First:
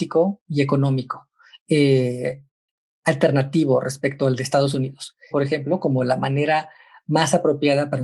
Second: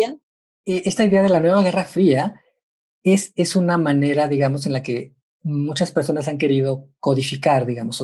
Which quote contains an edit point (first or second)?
first